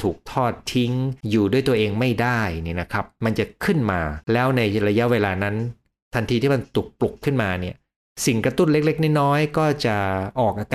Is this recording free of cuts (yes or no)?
no